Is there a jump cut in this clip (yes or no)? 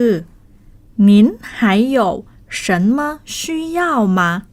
no